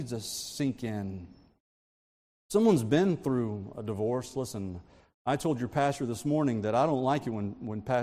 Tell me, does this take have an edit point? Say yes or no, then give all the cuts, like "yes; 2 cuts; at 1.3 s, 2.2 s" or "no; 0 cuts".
no; 0 cuts